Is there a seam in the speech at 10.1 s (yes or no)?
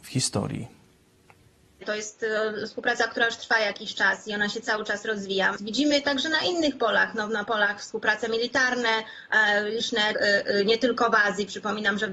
yes